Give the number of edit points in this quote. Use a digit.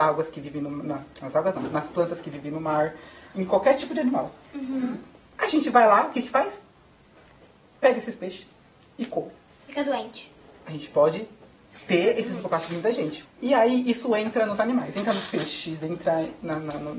2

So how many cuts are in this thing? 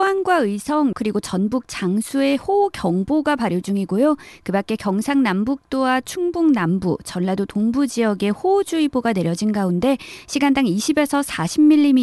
1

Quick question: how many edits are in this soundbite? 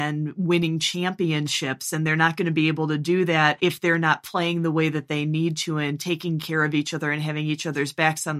0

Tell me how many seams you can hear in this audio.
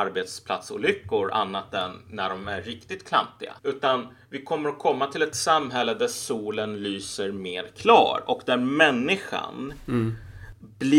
1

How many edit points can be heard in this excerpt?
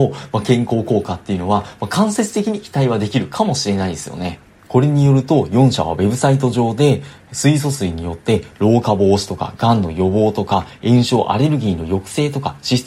1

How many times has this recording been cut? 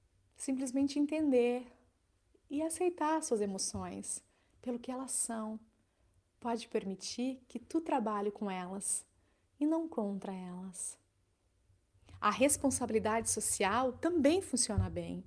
0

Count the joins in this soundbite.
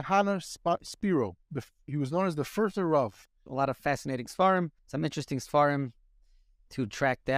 2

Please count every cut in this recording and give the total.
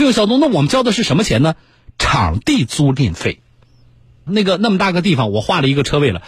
1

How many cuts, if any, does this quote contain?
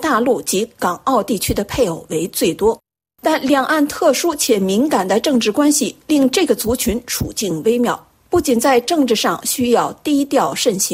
0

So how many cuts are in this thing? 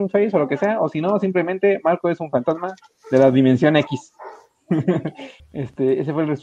1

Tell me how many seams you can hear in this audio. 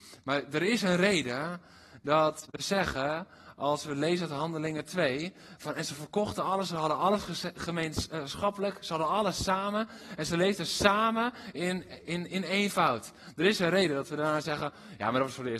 0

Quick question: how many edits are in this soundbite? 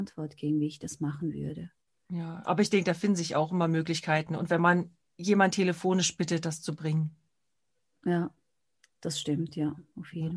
0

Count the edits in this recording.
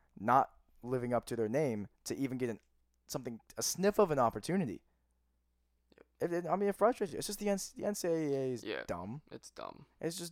0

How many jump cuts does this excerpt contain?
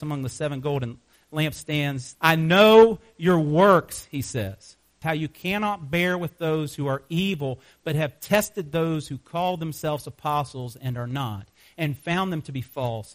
2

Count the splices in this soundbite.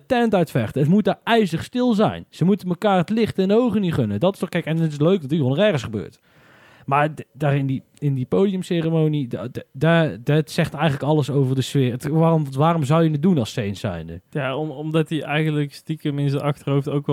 0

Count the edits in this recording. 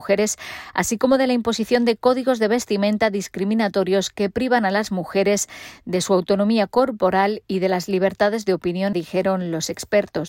1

